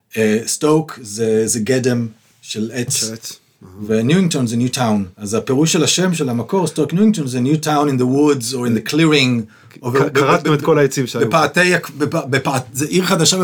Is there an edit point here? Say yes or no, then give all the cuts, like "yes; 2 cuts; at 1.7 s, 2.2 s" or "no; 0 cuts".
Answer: yes; 1 cut; at 5.1 s